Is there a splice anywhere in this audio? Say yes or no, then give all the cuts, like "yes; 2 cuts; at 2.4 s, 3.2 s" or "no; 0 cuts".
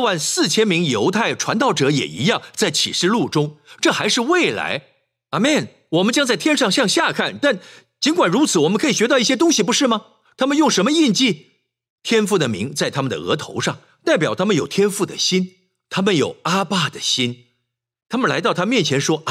no; 0 cuts